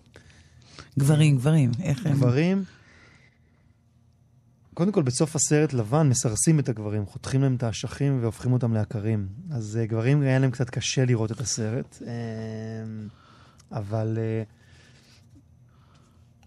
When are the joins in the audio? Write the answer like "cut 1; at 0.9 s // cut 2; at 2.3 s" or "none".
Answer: none